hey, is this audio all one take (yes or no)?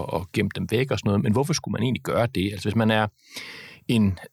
yes